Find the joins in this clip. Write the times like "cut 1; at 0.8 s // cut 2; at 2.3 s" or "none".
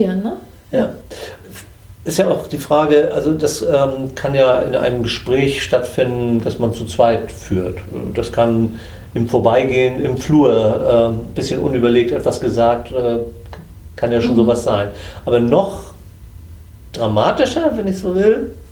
none